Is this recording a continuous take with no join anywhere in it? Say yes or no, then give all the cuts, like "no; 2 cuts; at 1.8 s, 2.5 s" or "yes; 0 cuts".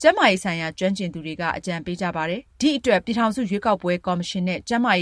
no; 1 cut; at 2.5 s